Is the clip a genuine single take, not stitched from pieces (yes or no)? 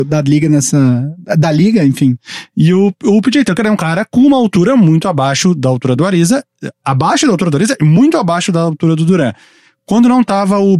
yes